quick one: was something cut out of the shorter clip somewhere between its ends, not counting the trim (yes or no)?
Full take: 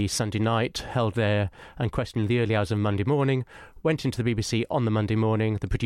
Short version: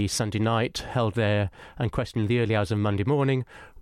no